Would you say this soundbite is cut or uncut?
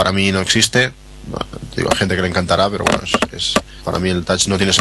cut